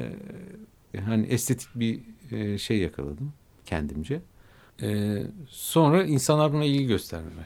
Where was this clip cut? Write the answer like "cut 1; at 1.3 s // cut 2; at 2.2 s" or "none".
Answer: cut 1; at 0.9 s // cut 2; at 4.7 s

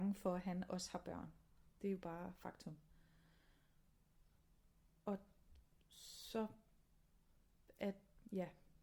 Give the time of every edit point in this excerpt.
cut 1; at 1.8 s

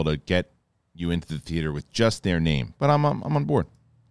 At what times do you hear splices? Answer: cut 1; at 2.8 s

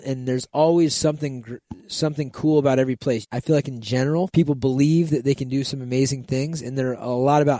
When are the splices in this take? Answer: cut 1; at 3.2 s // cut 2; at 4.3 s

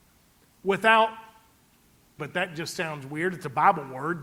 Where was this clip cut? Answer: cut 1; at 2.2 s

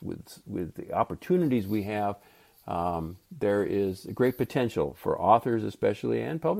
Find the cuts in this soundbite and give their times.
none

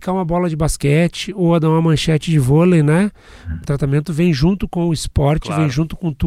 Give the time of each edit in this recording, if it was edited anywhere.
cut 1; at 3.6 s

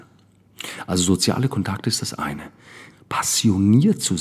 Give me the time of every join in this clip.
cut 1; at 2.9 s

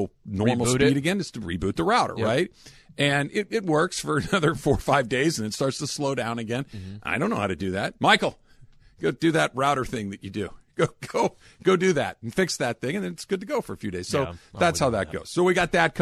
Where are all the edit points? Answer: cut 1; at 8.0 s

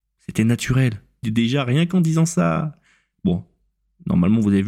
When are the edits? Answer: cut 1; at 1.2 s

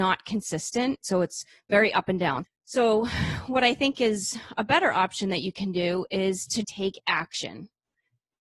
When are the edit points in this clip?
cut 1; at 1.0 s // cut 2; at 2.4 s // cut 3; at 6.6 s

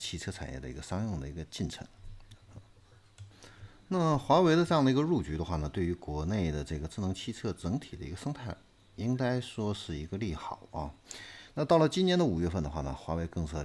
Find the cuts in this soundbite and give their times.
cut 1; at 11.5 s

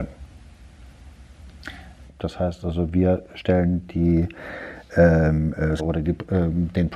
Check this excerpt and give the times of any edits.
cut 1; at 2.1 s // cut 2; at 5.8 s

